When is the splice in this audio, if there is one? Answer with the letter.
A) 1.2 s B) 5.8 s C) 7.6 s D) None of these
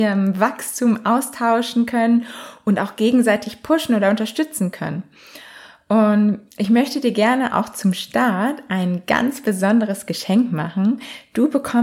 D